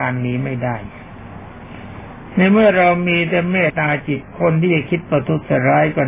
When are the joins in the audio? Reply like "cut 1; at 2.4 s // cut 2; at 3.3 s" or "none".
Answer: cut 1; at 3.7 s

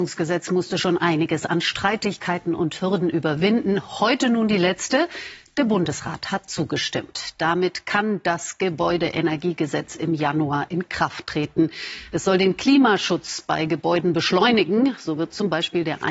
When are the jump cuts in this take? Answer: none

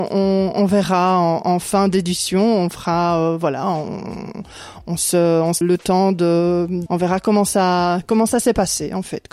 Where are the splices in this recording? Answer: cut 1; at 5.6 s // cut 2; at 6.9 s

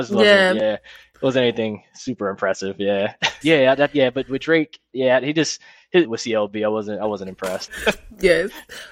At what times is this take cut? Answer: cut 1; at 3.4 s // cut 2; at 6.0 s // cut 3; at 7.7 s

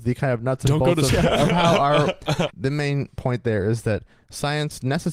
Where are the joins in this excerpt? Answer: cut 1; at 1.1 s // cut 2; at 2.5 s

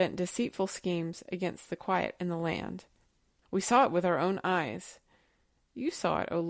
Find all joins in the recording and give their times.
cut 1; at 3.4 s

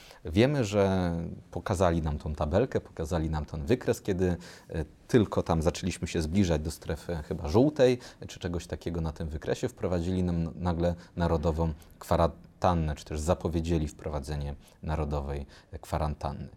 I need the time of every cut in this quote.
none

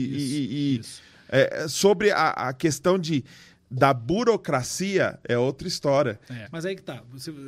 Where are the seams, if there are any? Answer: cut 1; at 6.5 s

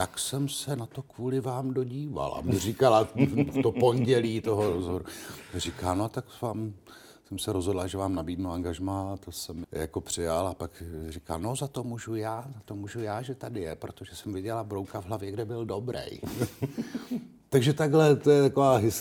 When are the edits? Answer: cut 1; at 9.6 s

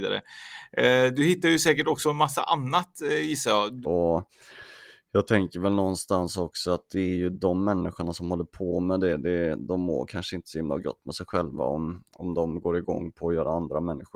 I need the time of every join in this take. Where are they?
cut 1; at 3.8 s

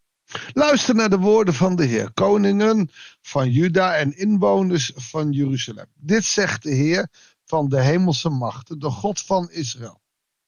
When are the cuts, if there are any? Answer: none

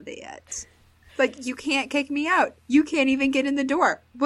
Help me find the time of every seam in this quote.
cut 1; at 1.1 s

